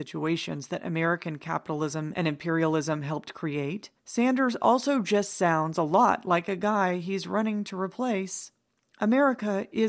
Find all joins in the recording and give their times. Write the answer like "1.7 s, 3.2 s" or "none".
4.0 s